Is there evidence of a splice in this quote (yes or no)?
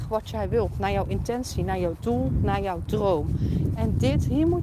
no